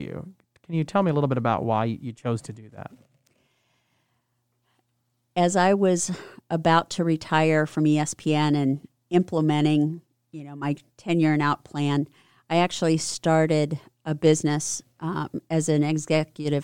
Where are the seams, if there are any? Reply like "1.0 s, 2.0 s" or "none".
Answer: none